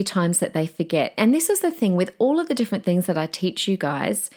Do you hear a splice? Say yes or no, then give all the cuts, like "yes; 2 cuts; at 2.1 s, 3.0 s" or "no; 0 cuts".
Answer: no; 0 cuts